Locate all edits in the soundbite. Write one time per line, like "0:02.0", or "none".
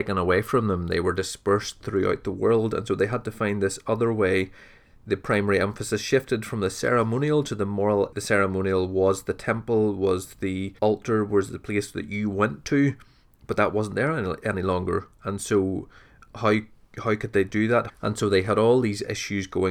0:08.1
0:10.8
0:17.9